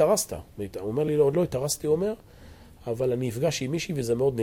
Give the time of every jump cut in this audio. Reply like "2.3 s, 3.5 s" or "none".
none